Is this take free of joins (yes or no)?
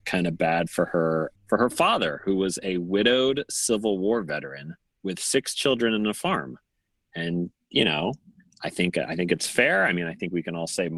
no